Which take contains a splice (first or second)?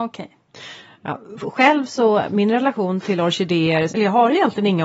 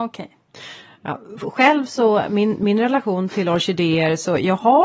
first